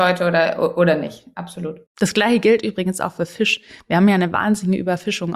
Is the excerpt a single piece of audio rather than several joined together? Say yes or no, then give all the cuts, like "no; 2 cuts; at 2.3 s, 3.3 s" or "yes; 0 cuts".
no; 1 cut; at 1.9 s